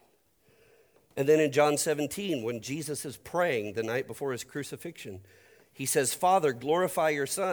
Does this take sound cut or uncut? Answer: uncut